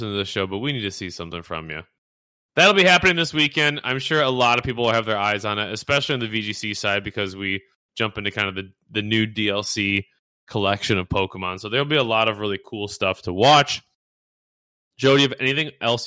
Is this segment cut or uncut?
cut